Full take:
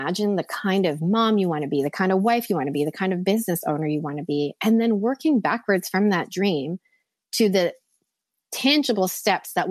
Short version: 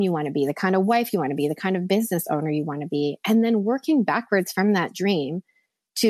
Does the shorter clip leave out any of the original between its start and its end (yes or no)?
no